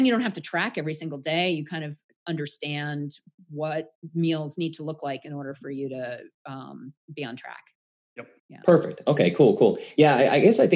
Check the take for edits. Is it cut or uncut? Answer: cut